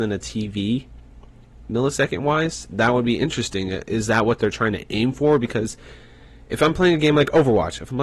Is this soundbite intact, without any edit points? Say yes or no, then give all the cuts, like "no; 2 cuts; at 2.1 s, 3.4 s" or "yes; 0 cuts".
yes; 0 cuts